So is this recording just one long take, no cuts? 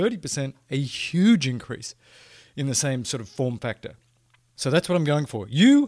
yes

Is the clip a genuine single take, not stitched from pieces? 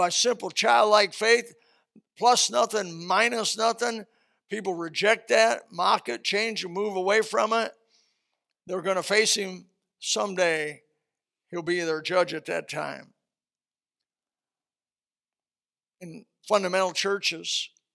yes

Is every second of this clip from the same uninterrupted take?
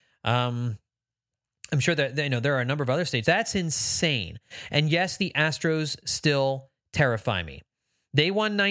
no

